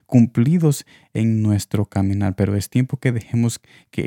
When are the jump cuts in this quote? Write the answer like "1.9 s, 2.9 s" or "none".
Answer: none